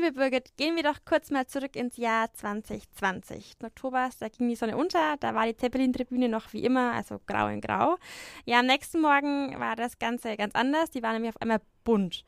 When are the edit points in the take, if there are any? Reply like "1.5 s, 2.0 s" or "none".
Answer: 3.6 s